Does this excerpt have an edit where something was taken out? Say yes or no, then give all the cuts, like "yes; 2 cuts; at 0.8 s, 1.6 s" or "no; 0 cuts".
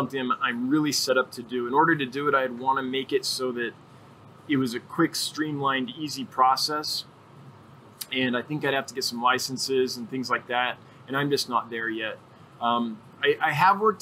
no; 0 cuts